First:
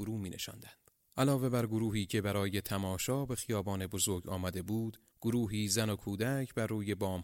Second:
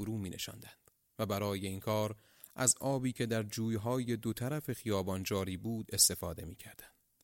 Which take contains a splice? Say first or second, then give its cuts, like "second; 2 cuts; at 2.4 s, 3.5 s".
first; 2 cuts; at 1.0 s, 5.1 s